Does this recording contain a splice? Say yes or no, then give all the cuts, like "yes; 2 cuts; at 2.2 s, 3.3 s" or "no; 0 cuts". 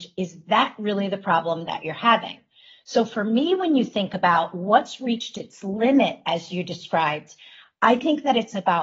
no; 0 cuts